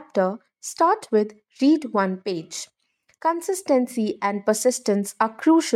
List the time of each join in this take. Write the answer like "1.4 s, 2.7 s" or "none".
3.1 s